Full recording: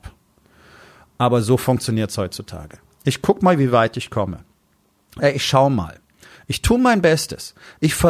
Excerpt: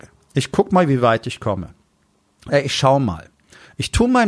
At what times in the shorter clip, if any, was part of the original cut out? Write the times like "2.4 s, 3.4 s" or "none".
none